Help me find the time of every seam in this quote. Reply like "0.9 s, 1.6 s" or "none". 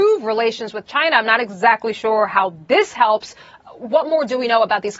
none

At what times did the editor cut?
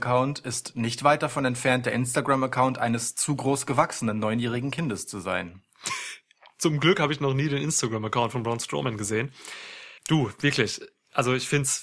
10.0 s

